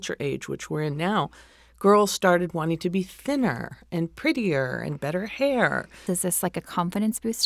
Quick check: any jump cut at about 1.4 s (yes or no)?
no